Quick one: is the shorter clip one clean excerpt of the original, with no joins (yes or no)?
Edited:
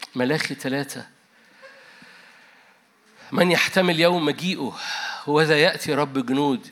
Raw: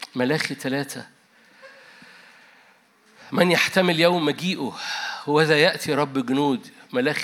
yes